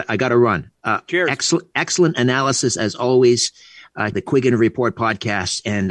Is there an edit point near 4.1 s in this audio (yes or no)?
yes